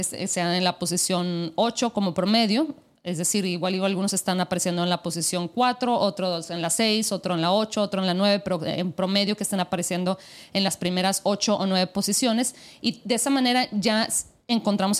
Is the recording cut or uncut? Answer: uncut